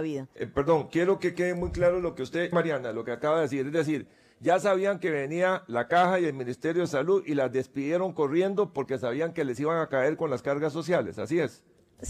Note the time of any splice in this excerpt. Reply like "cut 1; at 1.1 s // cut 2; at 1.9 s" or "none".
cut 1; at 2.5 s